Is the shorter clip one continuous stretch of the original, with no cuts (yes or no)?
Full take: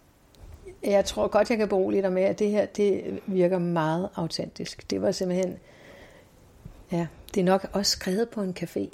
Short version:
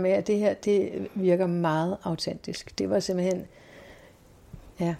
yes